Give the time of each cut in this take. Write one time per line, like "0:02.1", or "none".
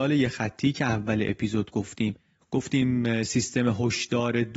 none